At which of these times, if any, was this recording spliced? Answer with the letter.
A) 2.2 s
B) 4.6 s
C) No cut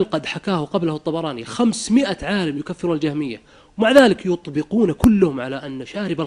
C